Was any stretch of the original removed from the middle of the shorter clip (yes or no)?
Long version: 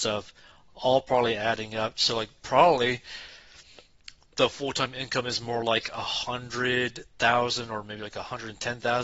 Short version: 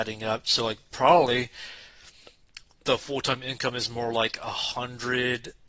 no